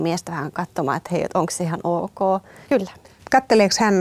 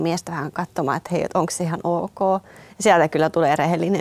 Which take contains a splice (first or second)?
first